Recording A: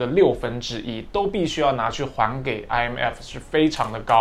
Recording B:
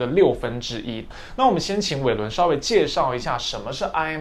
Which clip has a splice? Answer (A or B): B